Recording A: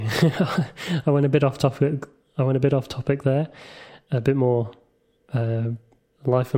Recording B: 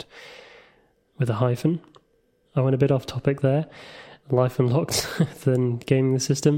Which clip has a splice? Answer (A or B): B